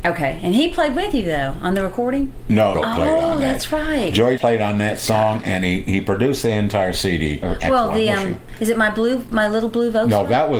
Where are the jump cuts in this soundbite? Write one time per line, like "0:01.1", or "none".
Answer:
0:02.7
0:04.4
0:07.4